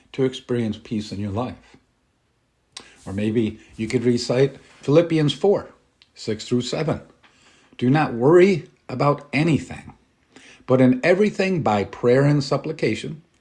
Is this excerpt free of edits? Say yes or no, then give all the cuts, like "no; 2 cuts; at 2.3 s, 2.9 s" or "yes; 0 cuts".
yes; 0 cuts